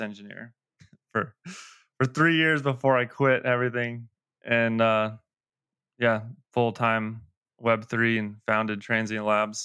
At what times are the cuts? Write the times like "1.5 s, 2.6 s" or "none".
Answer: none